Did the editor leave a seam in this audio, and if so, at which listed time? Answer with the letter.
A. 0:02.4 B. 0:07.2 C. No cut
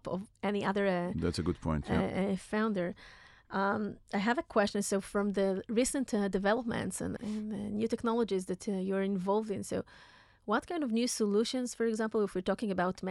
B